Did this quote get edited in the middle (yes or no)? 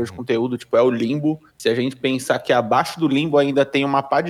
yes